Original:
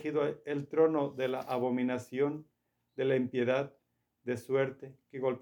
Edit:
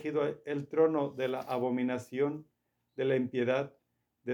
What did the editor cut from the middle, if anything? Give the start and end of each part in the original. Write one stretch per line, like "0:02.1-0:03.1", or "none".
none